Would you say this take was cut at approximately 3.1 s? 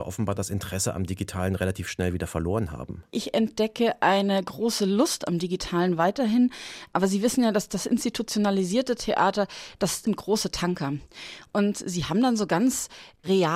yes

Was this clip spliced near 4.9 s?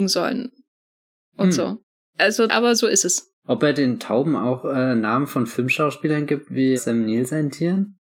no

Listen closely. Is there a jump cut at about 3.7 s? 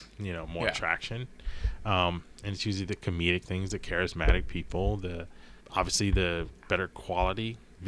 no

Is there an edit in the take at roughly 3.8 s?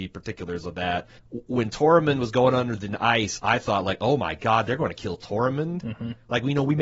no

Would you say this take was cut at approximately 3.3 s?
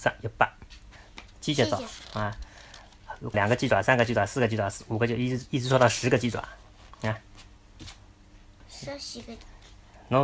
yes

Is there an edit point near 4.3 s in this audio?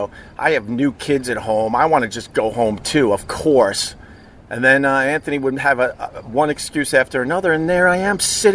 no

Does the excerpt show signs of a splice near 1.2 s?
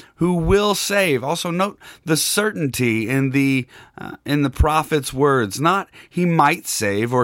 no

